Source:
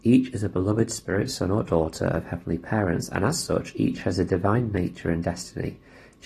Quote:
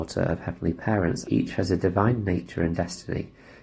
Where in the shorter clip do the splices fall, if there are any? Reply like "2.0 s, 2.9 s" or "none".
1.2 s